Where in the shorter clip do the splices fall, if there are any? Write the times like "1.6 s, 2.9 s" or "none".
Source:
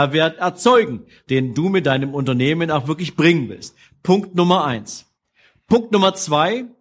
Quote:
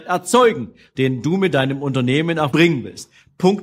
2.5 s

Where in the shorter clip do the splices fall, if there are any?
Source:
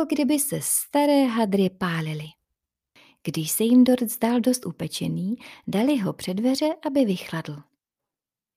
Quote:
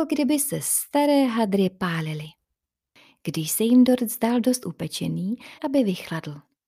5.6 s

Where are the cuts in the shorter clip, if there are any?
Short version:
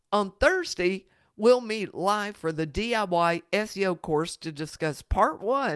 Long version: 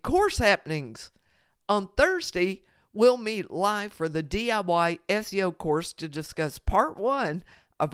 none

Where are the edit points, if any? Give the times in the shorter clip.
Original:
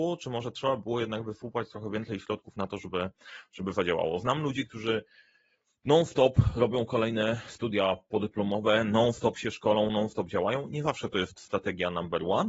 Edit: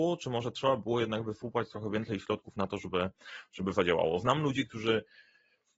none

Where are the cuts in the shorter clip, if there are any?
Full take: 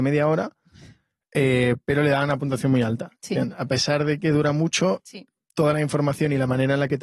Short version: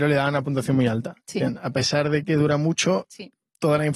none

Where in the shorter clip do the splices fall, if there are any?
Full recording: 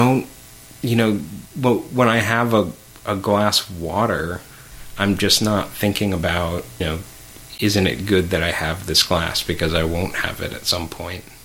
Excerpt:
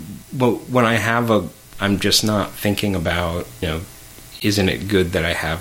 1.7 s

